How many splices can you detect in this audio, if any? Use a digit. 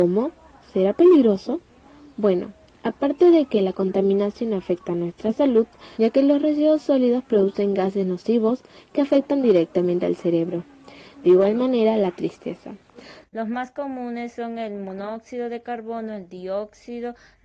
3